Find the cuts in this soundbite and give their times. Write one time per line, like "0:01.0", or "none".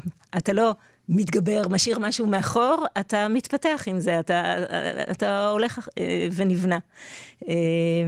none